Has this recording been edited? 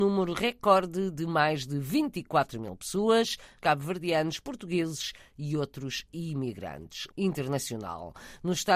yes; 2 cuts; at 3.6 s, 7.1 s

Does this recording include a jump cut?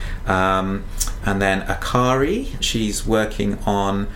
yes; 1 cut; at 2.6 s

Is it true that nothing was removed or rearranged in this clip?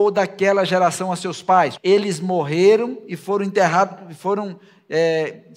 no; 1 cut; at 1.8 s

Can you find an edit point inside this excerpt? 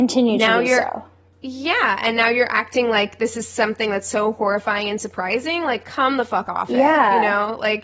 no; 0 cuts

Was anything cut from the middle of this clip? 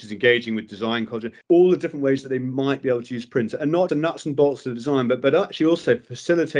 yes; 2 cuts; at 1.4 s, 3.9 s

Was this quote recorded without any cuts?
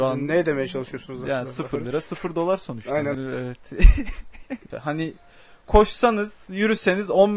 no; 2 cuts; at 3.1 s, 4.7 s

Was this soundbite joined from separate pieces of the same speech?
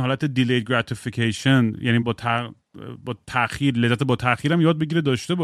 yes; 1 cut; at 2.0 s

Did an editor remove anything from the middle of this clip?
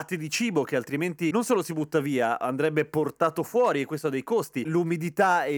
yes; 1 cut; at 4.6 s

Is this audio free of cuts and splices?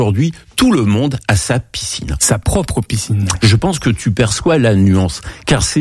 no; 1 cut; at 3.4 s

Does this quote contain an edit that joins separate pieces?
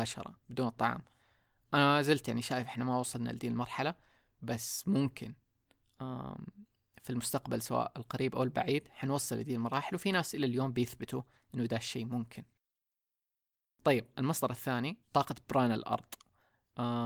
yes; 1 cut; at 15.0 s

